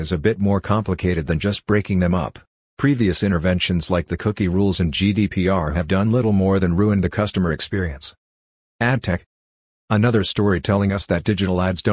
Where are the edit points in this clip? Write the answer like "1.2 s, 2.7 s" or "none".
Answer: 2.6 s